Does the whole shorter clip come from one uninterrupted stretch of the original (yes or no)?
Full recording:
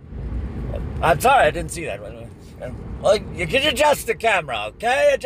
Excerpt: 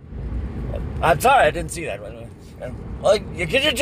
yes